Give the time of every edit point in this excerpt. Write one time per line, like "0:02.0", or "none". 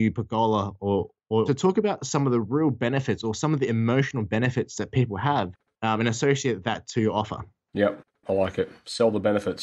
0:01.5